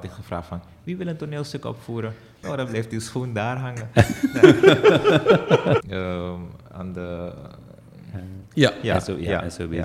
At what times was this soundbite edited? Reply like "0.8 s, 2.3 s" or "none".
2.4 s, 5.8 s, 8.5 s